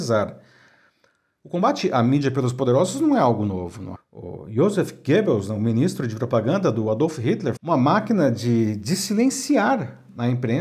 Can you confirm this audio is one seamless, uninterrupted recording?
no; 2 cuts; at 4.0 s, 7.6 s

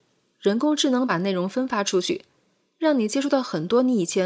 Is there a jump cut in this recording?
no; 0 cuts

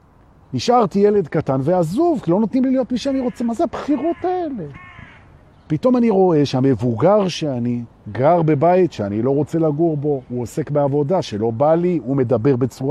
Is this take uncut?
yes; 0 cuts

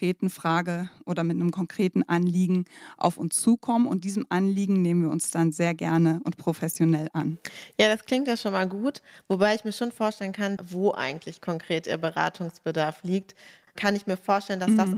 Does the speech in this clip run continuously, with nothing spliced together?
no; 2 cuts; at 10.6 s, 13.7 s

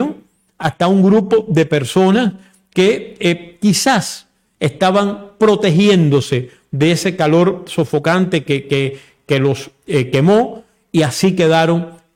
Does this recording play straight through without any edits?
yes; 0 cuts

